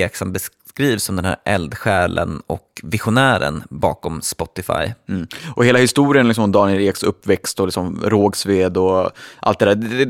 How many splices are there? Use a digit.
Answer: 0